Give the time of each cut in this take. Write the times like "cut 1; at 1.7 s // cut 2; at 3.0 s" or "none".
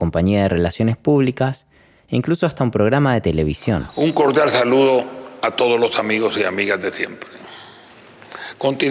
none